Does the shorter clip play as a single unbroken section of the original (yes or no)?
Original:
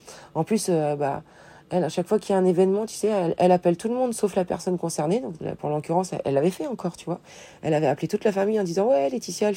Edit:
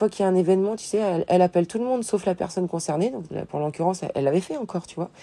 yes